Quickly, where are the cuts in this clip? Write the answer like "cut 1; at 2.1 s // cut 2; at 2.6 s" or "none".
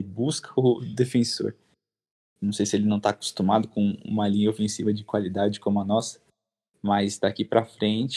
none